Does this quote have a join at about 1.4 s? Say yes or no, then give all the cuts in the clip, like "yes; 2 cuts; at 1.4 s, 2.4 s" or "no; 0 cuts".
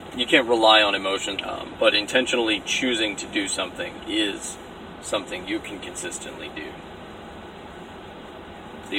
yes; 1 cut; at 1.4 s